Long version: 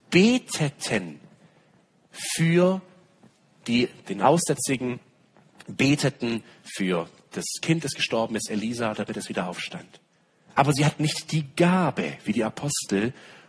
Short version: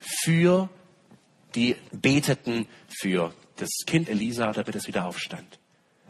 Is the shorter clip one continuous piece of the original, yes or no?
no